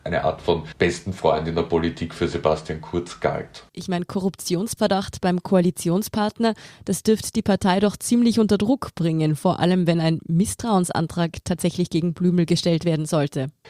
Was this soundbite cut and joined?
yes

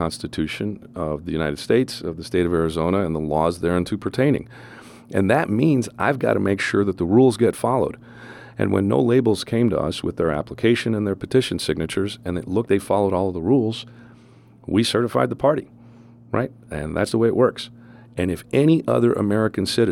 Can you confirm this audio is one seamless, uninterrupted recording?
no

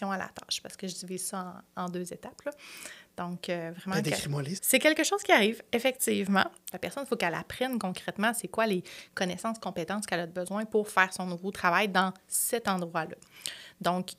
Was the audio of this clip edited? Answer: yes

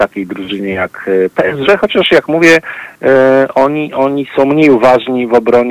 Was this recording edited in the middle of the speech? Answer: no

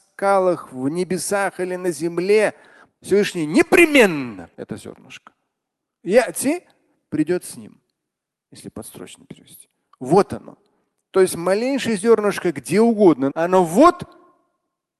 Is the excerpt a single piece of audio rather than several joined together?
no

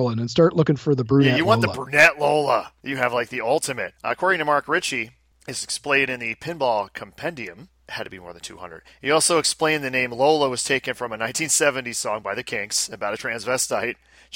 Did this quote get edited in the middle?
yes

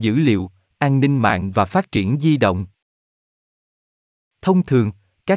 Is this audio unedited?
no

